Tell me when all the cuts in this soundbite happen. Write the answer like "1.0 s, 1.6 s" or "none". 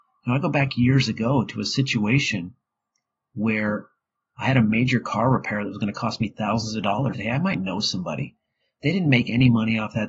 7.1 s